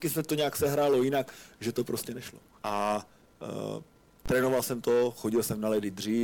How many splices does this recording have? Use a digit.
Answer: 1